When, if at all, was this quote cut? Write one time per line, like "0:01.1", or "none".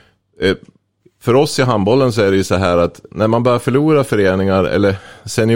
0:01.0